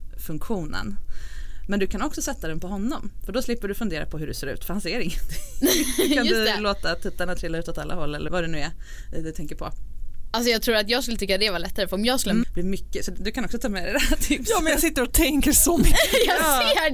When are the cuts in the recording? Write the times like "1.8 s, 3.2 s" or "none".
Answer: 8.3 s, 12.4 s